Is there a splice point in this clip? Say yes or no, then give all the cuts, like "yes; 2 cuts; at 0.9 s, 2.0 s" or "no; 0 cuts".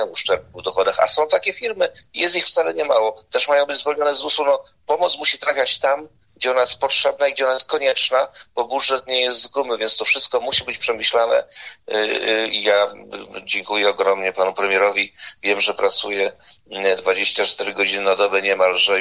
no; 0 cuts